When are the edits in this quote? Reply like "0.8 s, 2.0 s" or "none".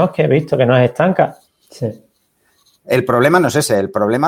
1.5 s